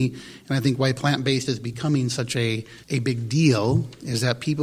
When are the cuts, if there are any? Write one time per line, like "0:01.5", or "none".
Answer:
0:02.8